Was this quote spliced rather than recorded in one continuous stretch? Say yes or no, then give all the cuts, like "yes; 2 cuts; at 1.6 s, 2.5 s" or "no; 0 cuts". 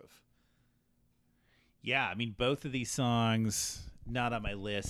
no; 0 cuts